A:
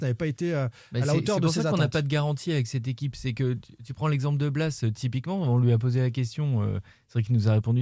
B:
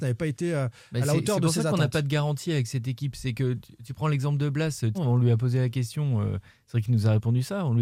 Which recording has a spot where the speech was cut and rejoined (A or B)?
B